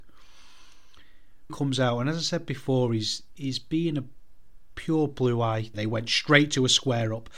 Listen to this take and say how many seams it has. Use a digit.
2